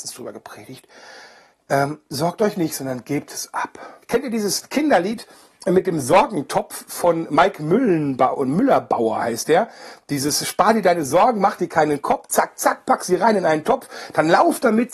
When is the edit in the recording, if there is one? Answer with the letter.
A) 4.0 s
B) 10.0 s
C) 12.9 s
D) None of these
A